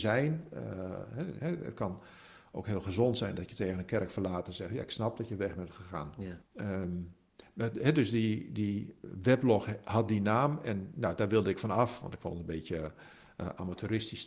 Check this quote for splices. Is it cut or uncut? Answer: cut